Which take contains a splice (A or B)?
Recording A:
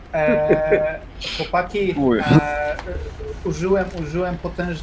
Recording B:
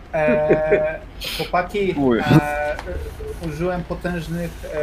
B